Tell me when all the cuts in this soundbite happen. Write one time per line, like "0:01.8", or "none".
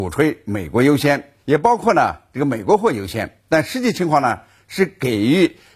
0:01.4